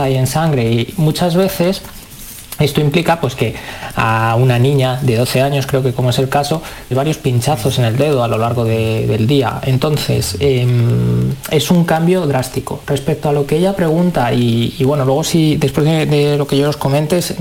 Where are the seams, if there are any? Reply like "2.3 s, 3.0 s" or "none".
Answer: 6.9 s